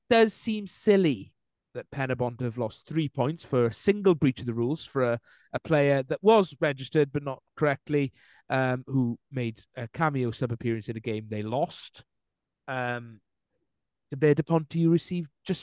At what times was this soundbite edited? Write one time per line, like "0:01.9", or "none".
none